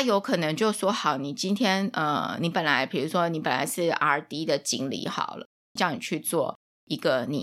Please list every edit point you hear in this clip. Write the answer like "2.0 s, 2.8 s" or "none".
5.8 s